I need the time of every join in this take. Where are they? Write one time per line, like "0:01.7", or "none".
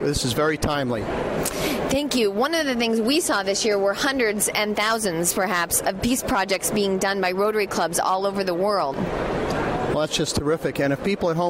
0:08.9